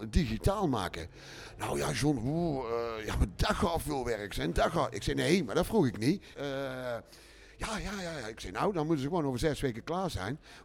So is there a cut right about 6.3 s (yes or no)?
yes